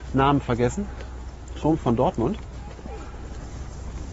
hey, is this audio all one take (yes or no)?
yes